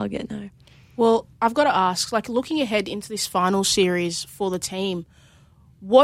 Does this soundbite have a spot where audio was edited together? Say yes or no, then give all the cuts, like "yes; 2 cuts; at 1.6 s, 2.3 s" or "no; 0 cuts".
no; 0 cuts